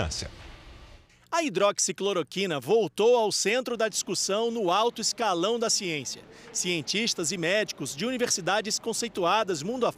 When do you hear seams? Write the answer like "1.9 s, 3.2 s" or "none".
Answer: none